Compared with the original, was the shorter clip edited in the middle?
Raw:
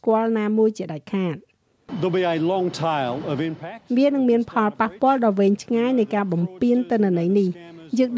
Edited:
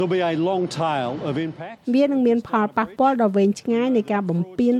no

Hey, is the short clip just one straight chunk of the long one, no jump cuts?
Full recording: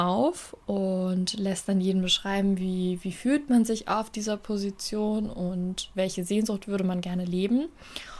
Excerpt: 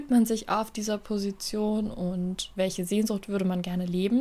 yes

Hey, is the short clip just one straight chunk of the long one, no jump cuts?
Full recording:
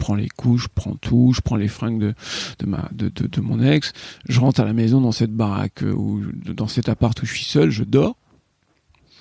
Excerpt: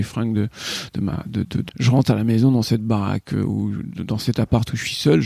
no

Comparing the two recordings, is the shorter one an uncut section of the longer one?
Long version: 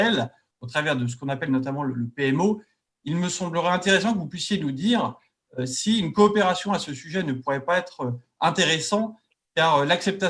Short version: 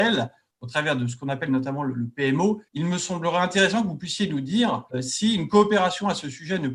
no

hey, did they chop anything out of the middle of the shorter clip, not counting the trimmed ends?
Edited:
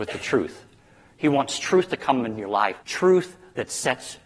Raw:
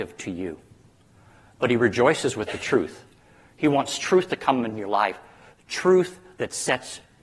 yes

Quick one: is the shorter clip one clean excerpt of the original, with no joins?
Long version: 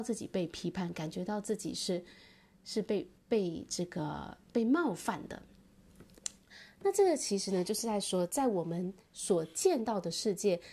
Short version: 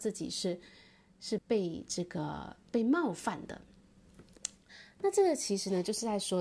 no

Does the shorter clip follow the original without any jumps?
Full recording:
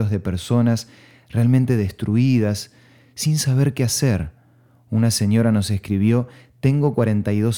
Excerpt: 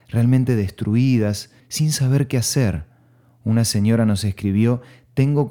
no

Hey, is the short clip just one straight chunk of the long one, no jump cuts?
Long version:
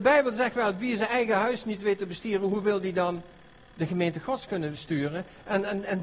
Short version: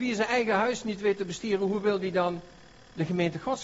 yes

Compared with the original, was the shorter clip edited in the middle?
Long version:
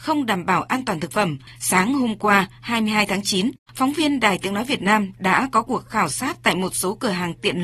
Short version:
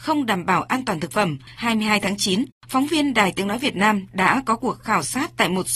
yes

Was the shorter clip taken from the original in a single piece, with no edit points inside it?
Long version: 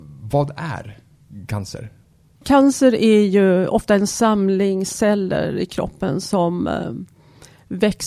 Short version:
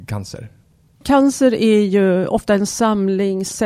yes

